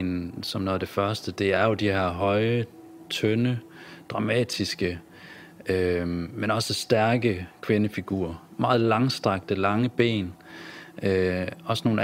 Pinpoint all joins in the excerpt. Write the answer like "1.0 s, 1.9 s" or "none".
none

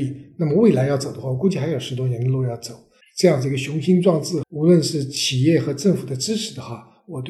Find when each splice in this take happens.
3.0 s, 4.4 s

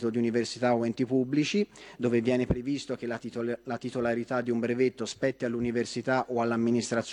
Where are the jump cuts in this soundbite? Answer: none

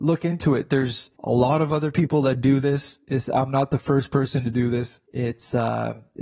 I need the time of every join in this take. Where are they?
none

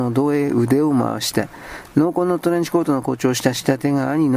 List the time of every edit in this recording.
none

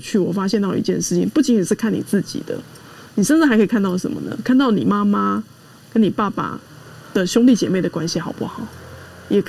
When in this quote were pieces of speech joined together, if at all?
none

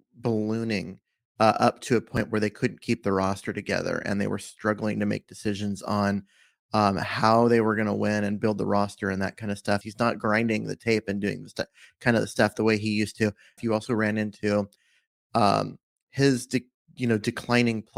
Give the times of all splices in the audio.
9.8 s, 13.6 s

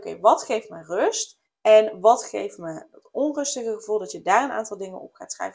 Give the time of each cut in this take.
1.5 s

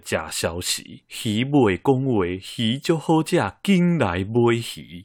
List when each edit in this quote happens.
none

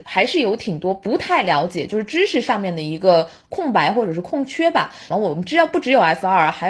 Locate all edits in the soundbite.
5.1 s

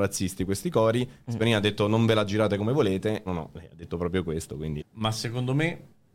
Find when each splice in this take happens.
3.3 s, 4.8 s

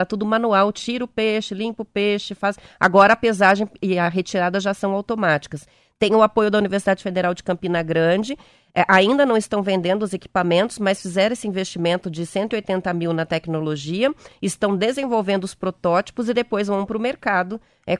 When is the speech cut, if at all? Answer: none

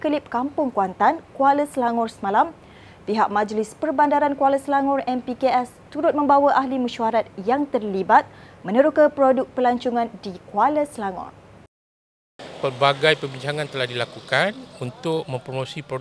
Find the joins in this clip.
none

